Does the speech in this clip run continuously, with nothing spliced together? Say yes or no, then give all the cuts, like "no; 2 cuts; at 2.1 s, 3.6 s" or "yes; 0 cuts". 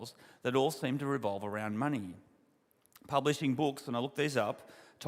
yes; 0 cuts